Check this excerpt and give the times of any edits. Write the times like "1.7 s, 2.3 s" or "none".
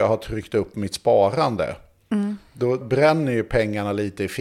2.8 s